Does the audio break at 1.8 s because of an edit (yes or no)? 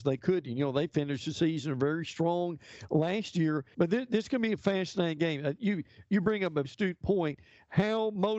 no